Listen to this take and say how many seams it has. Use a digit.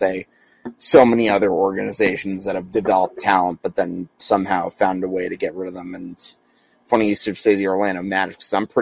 0